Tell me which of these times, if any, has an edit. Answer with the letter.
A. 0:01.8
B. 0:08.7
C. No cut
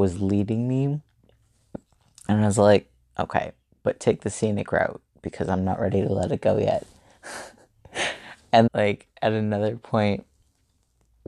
B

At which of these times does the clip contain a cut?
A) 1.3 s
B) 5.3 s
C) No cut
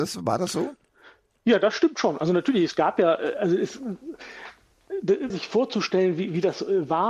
B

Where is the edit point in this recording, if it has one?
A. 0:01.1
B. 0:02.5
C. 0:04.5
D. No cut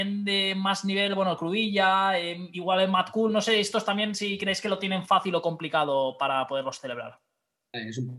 D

